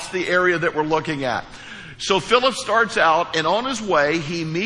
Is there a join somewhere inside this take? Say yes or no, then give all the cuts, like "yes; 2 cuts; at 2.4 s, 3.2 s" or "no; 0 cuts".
no; 0 cuts